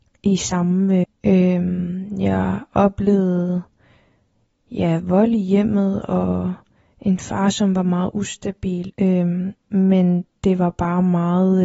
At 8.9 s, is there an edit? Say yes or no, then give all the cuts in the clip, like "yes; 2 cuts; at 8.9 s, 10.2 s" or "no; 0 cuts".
yes; 3 cuts; at 1.0 s, 8.9 s, 10.4 s